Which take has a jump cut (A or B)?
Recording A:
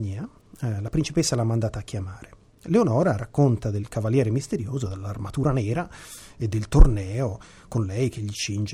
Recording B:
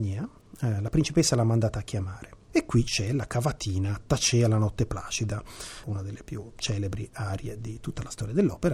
B